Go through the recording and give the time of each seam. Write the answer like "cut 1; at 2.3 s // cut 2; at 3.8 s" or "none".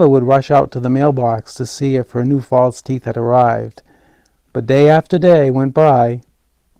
none